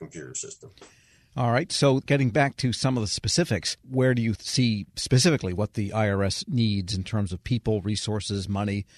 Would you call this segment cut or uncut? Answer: uncut